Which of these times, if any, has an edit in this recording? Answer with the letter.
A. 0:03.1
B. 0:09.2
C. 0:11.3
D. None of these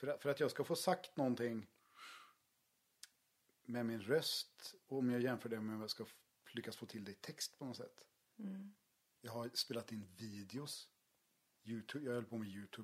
B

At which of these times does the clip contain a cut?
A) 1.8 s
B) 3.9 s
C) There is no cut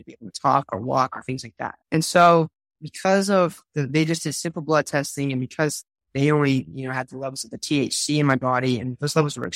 A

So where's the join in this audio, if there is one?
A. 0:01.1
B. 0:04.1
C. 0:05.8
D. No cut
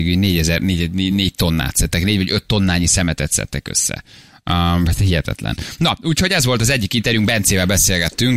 A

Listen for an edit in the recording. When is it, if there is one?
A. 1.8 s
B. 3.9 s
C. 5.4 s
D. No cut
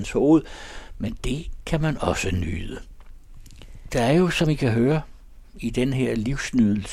B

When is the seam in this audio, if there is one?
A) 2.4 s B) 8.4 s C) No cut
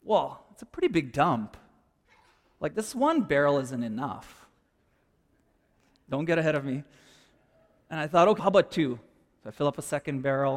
B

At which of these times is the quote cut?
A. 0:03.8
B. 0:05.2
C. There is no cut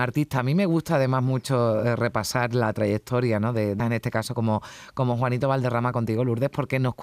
A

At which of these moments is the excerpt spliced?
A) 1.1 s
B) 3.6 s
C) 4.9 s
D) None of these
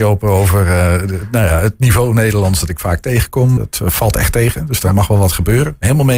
B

